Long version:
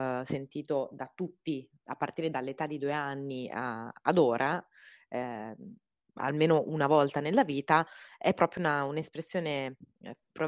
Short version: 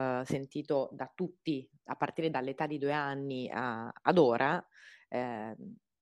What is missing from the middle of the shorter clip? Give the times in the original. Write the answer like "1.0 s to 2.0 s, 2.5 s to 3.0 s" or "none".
none